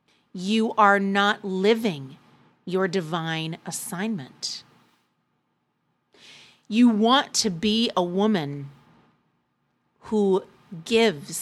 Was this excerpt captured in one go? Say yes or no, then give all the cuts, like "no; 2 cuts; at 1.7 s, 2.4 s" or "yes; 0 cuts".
yes; 0 cuts